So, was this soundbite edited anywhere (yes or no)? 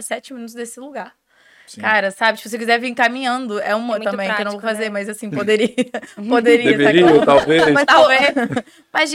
no